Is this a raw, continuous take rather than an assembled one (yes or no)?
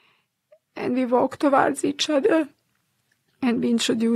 yes